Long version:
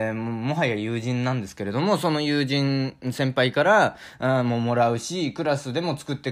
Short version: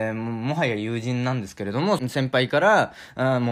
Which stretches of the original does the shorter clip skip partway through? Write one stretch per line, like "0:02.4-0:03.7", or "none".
0:02.0-0:03.0